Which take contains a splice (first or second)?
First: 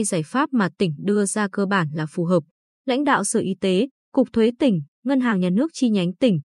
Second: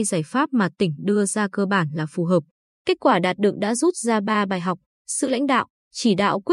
first